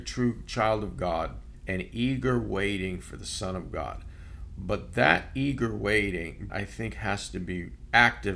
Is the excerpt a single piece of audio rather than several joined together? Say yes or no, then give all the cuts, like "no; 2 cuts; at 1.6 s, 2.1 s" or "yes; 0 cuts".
no; 1 cut; at 6.5 s